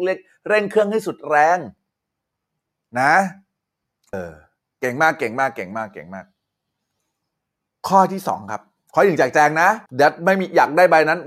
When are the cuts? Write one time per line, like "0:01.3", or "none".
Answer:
0:04.1
0:09.9

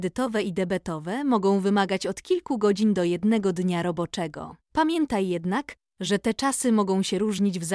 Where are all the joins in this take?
0:04.6

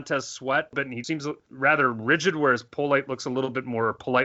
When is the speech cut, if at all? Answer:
0:01.0

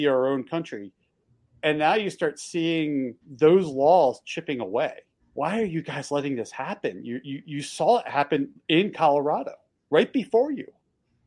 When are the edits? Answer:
0:03.2
0:05.2

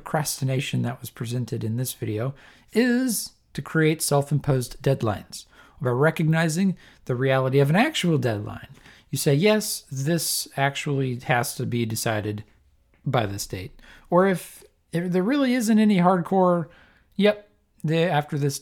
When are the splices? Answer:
none

